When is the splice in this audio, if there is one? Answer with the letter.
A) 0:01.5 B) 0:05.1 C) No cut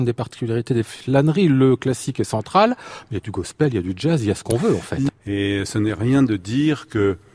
B